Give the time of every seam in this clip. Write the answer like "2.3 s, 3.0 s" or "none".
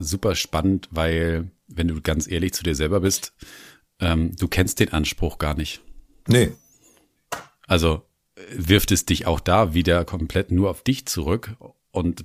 none